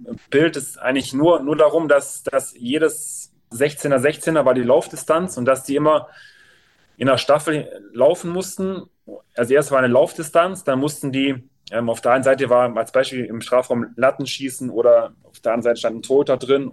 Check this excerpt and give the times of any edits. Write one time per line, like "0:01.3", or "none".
0:03.5